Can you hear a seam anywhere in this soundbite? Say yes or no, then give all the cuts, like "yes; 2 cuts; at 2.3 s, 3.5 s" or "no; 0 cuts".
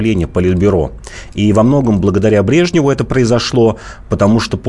no; 0 cuts